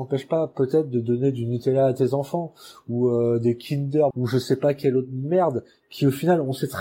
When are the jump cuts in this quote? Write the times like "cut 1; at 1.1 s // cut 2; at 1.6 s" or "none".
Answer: cut 1; at 4.1 s